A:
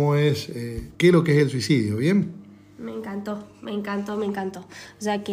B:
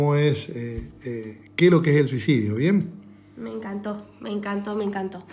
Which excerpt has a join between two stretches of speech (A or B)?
A